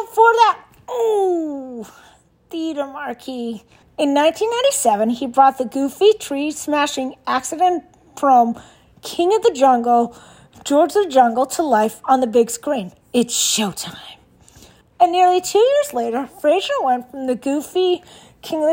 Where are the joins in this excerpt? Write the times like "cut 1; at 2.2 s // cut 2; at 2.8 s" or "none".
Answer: cut 1; at 3.8 s // cut 2; at 13.0 s // cut 3; at 14.8 s